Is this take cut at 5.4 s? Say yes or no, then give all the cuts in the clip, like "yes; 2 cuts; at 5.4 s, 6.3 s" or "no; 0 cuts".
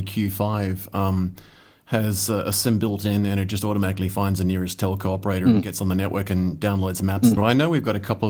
no; 1 cut; at 7.4 s